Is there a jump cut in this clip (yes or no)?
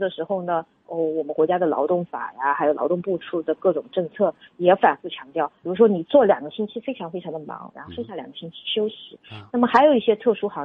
yes